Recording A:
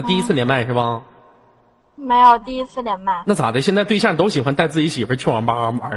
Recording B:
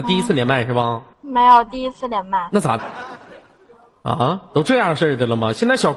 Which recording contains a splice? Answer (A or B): B